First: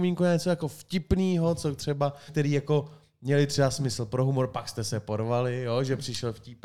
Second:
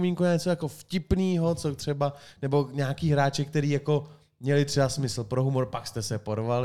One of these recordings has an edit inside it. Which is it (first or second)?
first